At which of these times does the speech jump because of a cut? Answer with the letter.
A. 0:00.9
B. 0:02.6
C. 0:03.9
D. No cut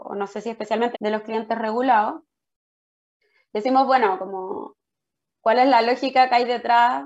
A